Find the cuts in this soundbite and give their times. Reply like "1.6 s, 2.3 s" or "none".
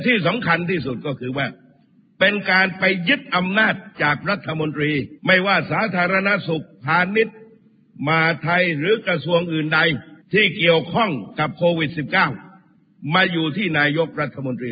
5.2 s, 10.2 s